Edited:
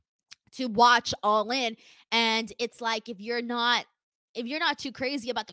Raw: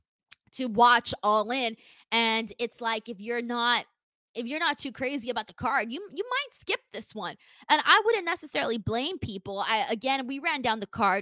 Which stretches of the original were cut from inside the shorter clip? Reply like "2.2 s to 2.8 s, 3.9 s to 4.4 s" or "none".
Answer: none